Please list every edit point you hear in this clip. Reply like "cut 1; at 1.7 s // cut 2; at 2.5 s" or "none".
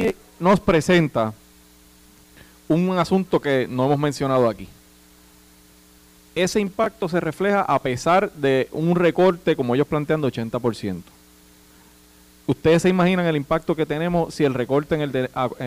none